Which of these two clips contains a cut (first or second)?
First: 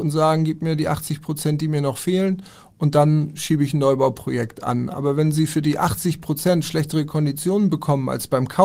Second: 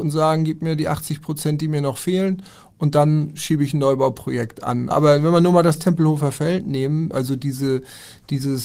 second